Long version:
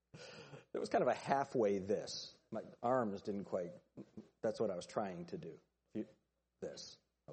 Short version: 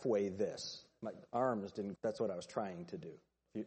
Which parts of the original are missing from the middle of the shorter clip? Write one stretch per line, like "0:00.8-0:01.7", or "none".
0:03.5-0:04.4